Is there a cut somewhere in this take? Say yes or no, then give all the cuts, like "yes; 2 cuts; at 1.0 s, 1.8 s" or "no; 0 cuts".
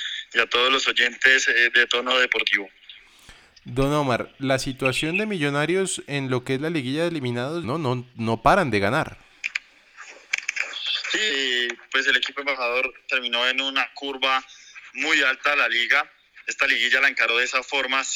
yes; 2 cuts; at 7.6 s, 11.3 s